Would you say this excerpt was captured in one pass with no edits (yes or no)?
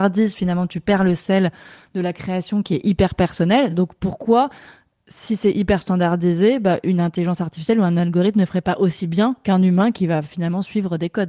yes